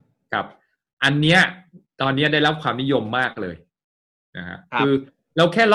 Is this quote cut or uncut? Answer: uncut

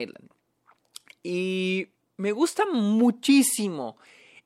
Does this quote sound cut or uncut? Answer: uncut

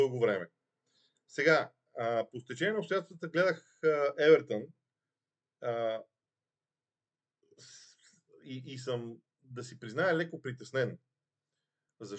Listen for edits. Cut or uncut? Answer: uncut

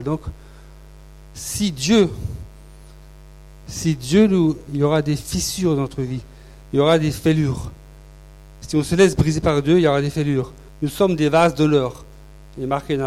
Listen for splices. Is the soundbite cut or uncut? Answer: cut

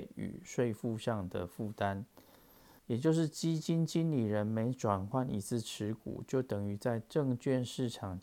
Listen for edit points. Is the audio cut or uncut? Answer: cut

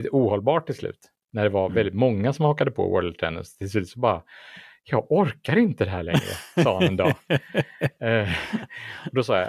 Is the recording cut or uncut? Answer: uncut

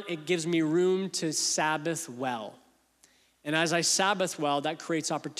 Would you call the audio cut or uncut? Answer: uncut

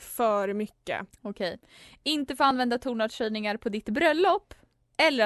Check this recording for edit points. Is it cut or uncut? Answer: uncut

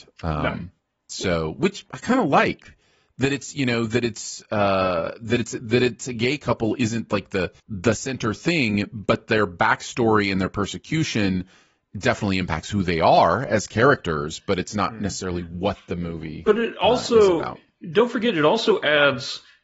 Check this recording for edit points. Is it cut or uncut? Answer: cut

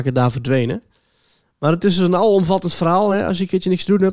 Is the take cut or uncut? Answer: uncut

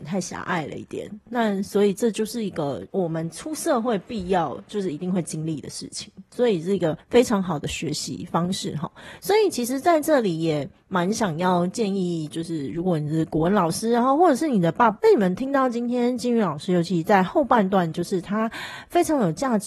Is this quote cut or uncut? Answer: cut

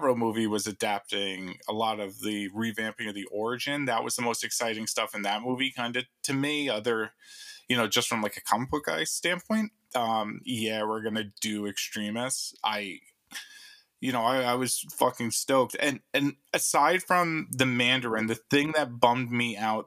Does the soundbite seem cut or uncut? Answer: cut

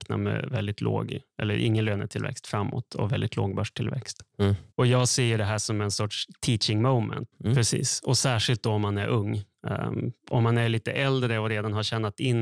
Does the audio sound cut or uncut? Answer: cut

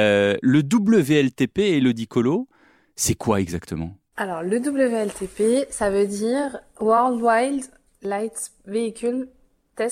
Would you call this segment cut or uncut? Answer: uncut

